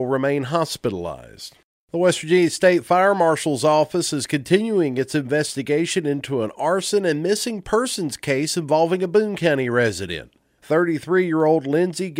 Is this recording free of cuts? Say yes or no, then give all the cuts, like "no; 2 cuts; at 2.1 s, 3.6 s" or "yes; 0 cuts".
yes; 0 cuts